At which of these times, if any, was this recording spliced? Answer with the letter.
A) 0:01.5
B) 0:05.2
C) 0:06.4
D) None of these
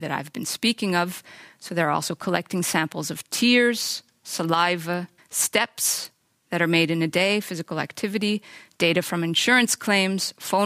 B